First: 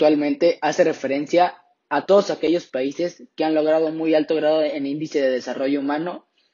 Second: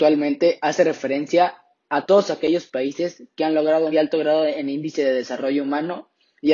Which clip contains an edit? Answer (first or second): second